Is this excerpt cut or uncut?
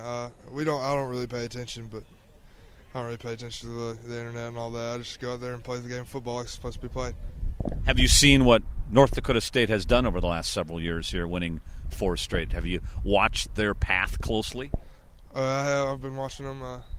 uncut